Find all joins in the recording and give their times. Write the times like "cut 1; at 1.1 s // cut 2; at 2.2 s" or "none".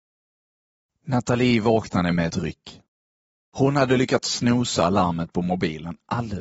none